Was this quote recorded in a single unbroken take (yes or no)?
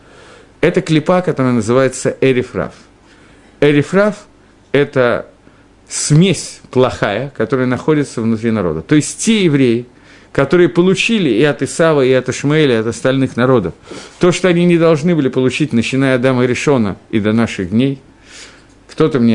yes